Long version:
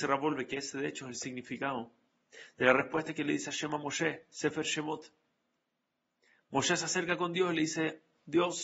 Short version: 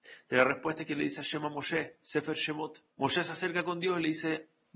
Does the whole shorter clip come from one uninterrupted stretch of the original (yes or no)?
no